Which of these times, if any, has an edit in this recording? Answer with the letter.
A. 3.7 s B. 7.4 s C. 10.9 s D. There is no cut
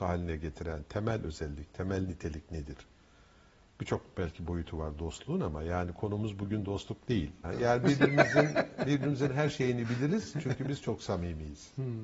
B